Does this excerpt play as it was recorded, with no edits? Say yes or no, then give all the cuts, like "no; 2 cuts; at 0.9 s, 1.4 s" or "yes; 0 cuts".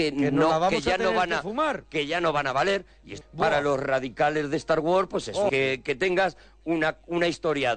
no; 2 cuts; at 3.2 s, 5.5 s